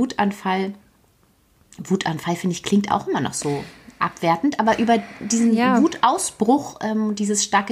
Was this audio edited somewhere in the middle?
no; 0 cuts

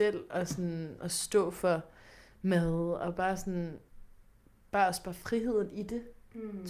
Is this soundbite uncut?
yes; 0 cuts

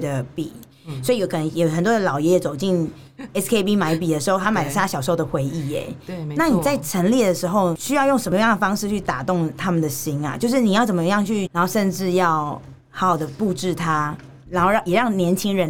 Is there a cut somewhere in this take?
yes; 2 cuts; at 11.5 s, 12.8 s

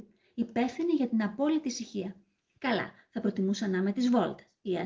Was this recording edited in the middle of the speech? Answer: yes; 1 cut; at 2.6 s

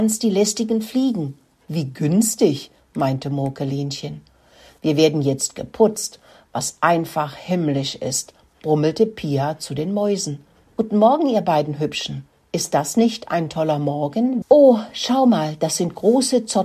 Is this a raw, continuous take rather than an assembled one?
no; 3 cuts; at 4.8 s, 10.6 s, 14.4 s

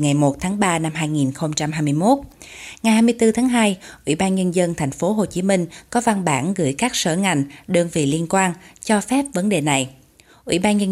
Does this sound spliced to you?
no; 0 cuts

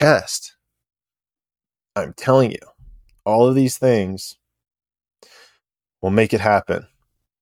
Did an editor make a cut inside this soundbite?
no; 0 cuts

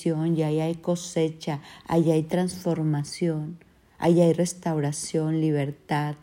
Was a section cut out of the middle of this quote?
no; 0 cuts

